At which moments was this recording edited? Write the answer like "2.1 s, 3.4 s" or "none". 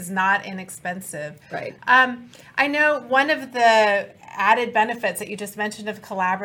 1.8 s